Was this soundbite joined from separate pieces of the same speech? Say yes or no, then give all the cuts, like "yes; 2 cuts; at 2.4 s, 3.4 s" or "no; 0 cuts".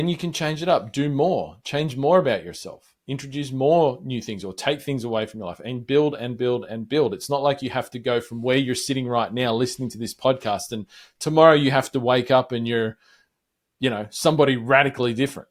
no; 0 cuts